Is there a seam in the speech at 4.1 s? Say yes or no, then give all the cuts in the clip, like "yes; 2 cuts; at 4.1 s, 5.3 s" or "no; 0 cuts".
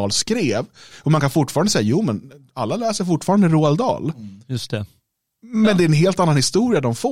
no; 0 cuts